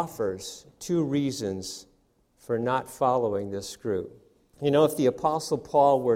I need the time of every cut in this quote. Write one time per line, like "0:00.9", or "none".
0:04.5